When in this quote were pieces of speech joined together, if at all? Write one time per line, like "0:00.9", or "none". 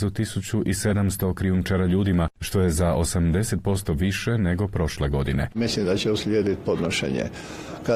0:05.5

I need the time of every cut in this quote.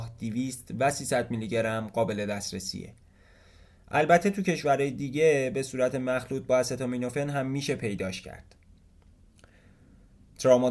none

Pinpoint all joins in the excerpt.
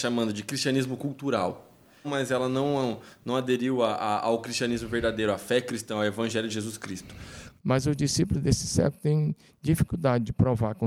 0:02.0
0:07.6

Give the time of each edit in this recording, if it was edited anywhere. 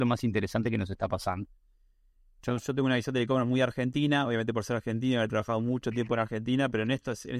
none

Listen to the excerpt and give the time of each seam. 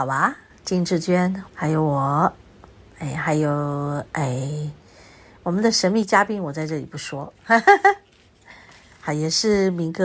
0:01.5

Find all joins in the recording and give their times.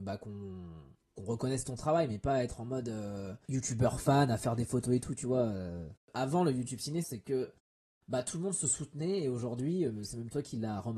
0:06.0
0:07.0

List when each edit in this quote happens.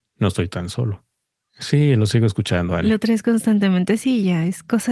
none

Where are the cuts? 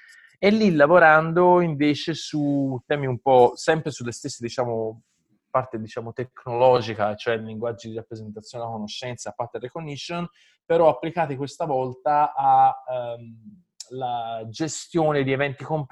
none

